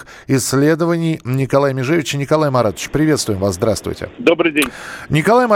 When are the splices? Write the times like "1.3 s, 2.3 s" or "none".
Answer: 4.1 s